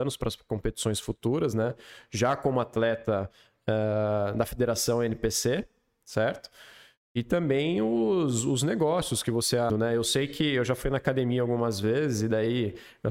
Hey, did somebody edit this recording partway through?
yes; 1 cut; at 9.7 s

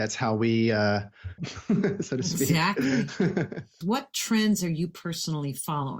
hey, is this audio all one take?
no; 2 cuts; at 1.4 s, 3.8 s

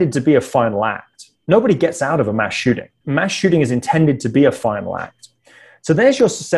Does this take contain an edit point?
yes; 1 cut; at 3.0 s

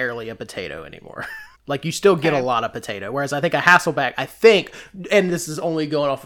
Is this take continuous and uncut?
no; 1 cut; at 1.5 s

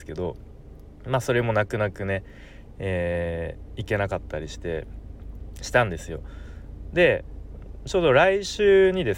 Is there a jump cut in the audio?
no; 0 cuts

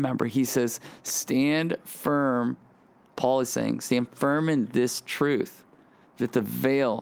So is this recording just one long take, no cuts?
yes; 0 cuts

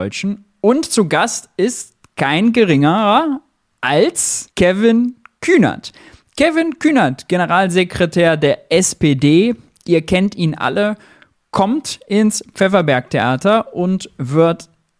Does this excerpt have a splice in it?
yes; 1 cut; at 4.5 s

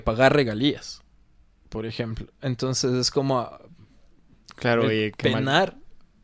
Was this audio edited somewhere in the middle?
no; 0 cuts

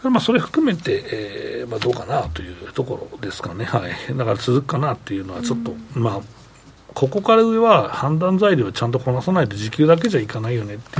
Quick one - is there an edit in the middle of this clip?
no; 0 cuts

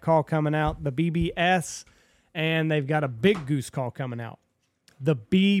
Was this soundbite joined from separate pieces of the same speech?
no; 0 cuts

